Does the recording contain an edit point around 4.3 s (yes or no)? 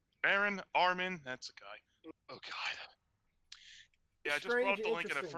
yes